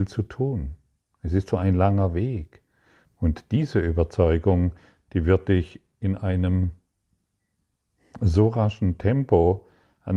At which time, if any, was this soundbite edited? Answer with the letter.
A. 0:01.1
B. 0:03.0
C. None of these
B